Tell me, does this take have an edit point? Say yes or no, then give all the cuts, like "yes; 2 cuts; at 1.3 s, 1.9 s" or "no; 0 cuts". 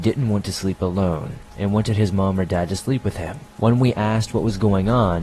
yes; 1 cut; at 3.5 s